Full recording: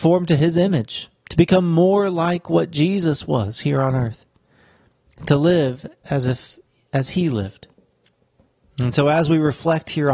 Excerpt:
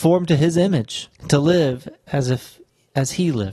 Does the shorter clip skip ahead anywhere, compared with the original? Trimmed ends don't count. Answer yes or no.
yes